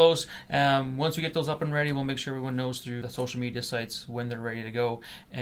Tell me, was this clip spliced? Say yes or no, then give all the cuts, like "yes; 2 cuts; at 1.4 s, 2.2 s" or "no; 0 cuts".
yes; 1 cut; at 3.0 s